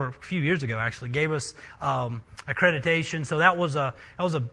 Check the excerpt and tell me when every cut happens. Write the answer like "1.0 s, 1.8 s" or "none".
none

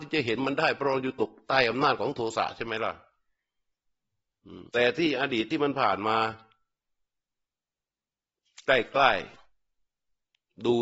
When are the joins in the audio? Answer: 4.7 s

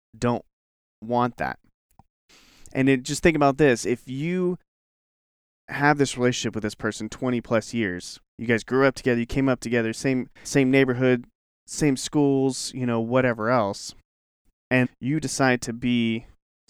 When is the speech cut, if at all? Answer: 10.4 s, 14.8 s

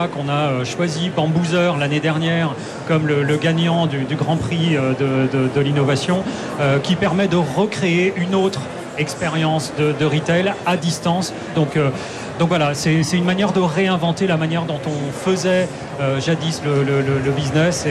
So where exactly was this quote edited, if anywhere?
11.5 s

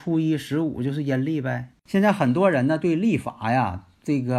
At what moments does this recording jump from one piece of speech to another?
1.7 s

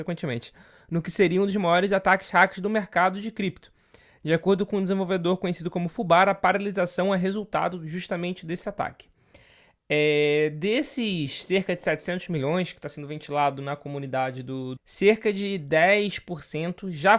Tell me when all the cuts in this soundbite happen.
14.8 s

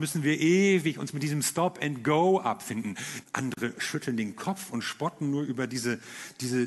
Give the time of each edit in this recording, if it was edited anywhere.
3.2 s

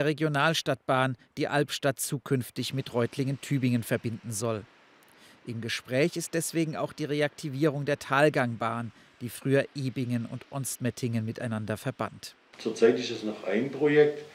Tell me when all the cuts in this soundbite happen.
12.5 s

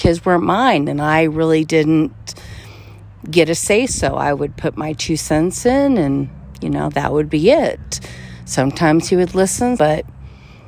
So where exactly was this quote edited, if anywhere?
9.8 s

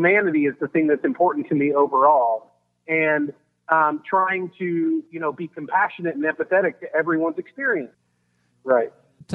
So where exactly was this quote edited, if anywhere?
7.9 s

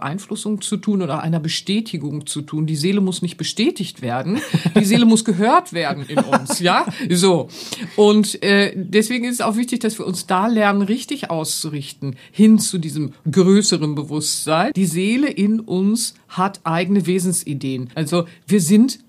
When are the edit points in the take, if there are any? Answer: 14.7 s, 17.9 s

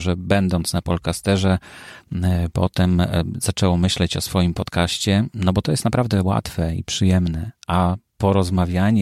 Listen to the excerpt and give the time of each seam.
none

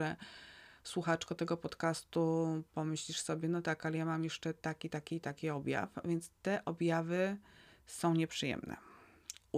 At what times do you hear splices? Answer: none

